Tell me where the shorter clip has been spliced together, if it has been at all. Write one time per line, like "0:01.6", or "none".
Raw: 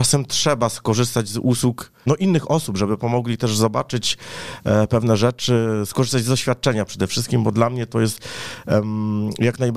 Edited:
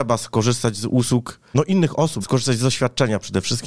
0:02.2